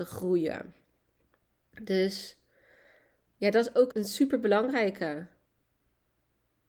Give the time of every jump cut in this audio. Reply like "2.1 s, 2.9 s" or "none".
3.9 s